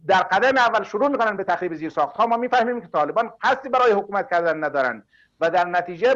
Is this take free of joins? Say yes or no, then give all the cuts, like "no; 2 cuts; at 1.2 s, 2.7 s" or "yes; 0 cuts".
yes; 0 cuts